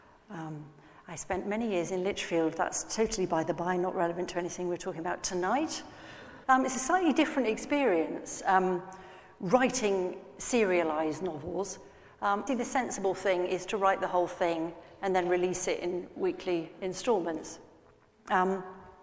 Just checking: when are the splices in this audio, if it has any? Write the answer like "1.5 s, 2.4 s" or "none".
6.4 s, 12.5 s

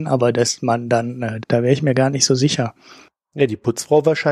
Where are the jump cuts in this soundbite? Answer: 1.4 s

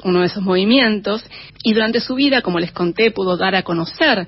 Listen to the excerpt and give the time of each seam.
1.5 s

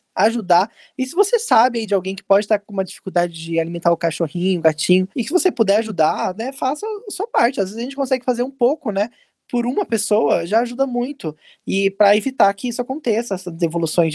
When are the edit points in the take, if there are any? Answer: 5.1 s

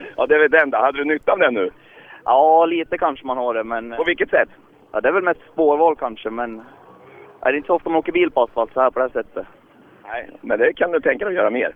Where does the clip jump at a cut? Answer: none

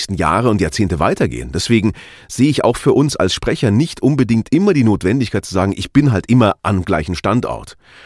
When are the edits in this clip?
none

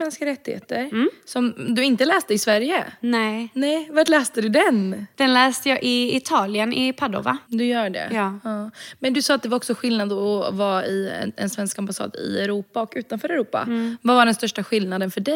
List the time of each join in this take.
7.4 s

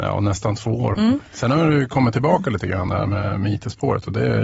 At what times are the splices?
0.9 s

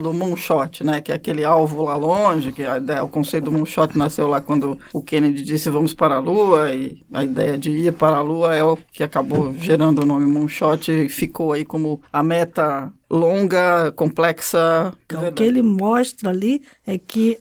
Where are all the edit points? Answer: 15.1 s

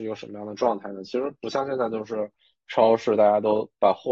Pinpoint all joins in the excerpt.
none

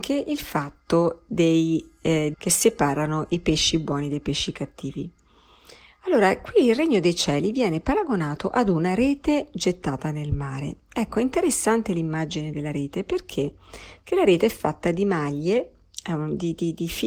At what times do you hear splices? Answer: 2.3 s

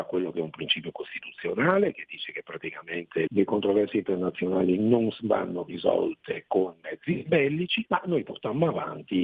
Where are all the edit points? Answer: 3.3 s, 7.9 s

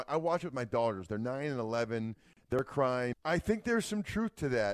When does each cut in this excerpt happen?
3.1 s

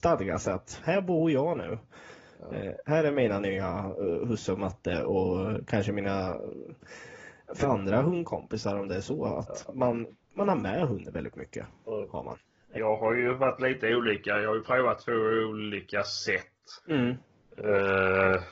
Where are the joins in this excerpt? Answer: 7.6 s, 12.8 s, 16.8 s

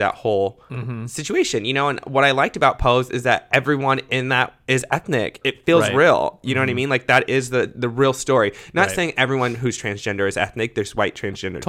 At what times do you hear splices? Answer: 5.4 s

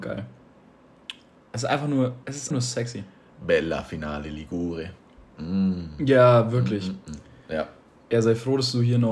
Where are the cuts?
2.5 s

